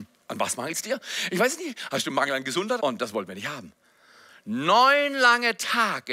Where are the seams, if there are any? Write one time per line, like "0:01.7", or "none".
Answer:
0:02.8

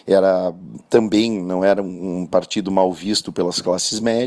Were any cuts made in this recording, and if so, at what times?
none

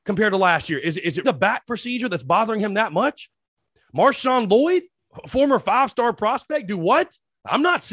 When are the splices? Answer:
0:01.2

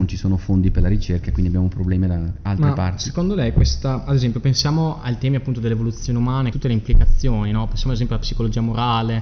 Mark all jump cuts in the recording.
0:06.5

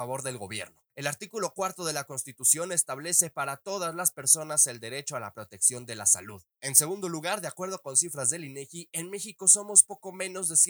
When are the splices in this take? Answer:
none

